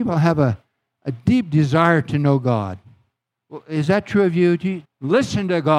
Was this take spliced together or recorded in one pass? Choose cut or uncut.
cut